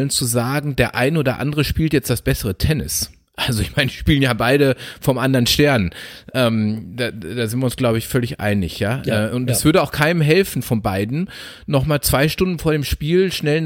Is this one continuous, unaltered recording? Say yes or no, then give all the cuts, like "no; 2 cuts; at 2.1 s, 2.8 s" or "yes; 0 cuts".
yes; 0 cuts